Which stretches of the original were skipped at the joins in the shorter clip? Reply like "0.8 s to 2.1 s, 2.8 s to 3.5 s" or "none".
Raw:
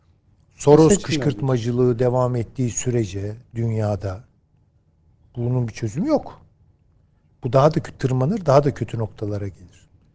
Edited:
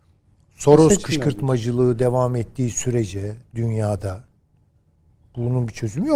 none